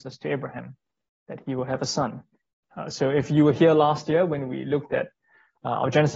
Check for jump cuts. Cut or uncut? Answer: cut